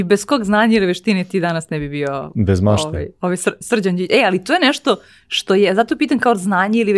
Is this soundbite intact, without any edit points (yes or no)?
yes